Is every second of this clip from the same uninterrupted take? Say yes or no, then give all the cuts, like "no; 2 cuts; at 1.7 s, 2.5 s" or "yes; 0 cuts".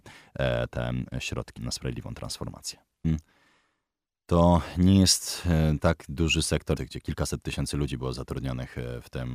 no; 3 cuts; at 1.6 s, 3.0 s, 6.8 s